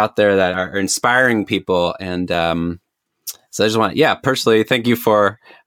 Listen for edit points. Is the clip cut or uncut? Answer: uncut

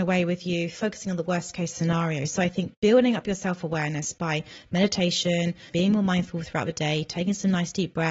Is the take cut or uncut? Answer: cut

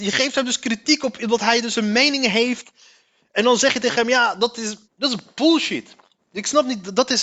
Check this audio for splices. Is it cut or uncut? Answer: cut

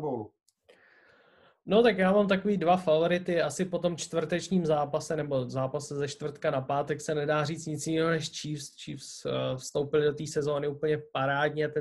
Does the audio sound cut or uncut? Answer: uncut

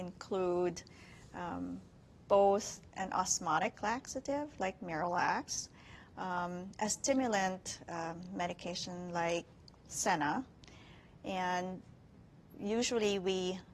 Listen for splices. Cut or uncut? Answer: uncut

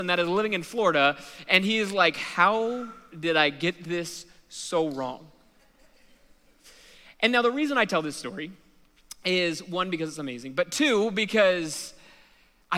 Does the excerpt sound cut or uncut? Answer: uncut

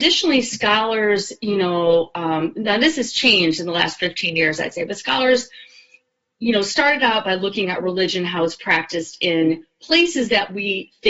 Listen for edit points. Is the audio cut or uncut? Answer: uncut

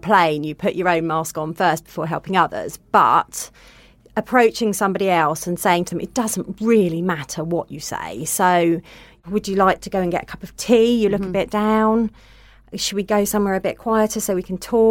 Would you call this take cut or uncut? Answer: uncut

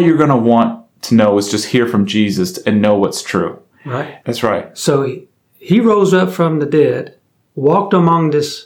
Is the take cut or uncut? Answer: cut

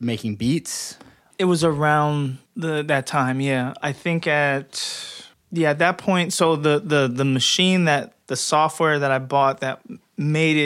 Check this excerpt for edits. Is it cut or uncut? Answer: uncut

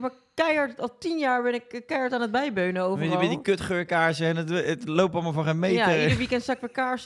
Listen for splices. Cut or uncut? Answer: uncut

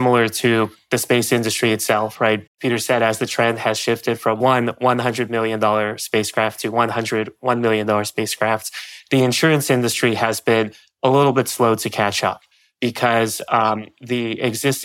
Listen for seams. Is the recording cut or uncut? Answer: cut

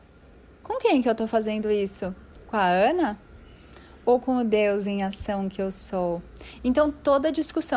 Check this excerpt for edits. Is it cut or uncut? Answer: uncut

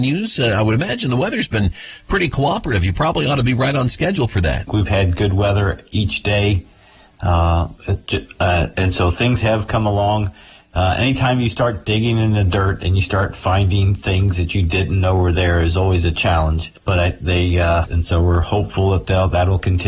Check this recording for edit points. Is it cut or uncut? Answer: cut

